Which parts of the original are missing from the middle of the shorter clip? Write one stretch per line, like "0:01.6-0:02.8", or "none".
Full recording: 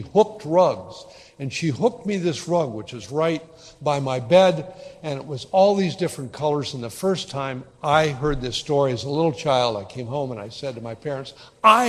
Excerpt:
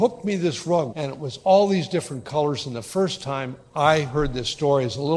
0:02.7-0:05.0